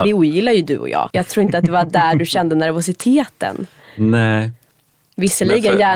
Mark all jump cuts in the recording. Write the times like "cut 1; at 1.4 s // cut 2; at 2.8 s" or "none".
cut 1; at 1.1 s

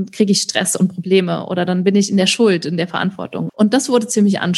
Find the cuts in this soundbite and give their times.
cut 1; at 3.5 s

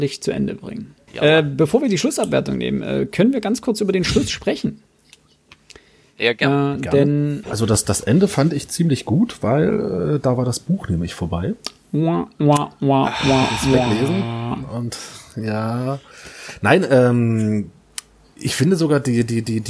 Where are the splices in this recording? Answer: cut 1; at 1.1 s // cut 2; at 7.4 s

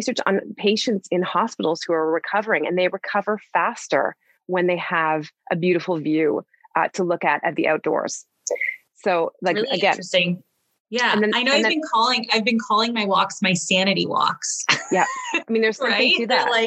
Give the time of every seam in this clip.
none

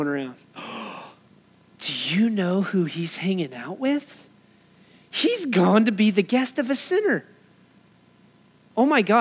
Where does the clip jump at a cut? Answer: none

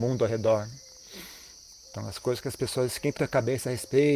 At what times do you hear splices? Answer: cut 1; at 3.2 s

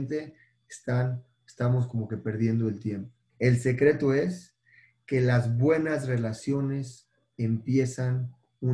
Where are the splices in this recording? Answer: cut 1; at 3.3 s

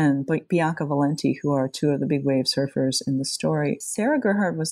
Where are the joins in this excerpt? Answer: none

